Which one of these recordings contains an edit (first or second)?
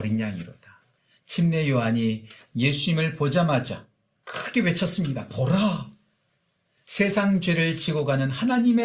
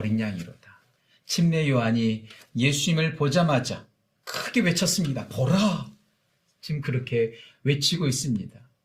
second